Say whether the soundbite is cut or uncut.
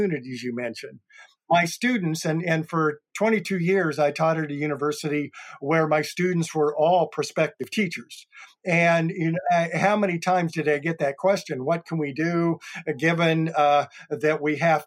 uncut